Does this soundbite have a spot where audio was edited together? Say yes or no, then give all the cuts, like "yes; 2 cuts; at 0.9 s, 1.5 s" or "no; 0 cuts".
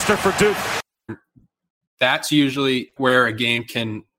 yes; 2 cuts; at 1.1 s, 3.0 s